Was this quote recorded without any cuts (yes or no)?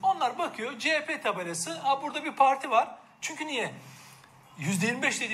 no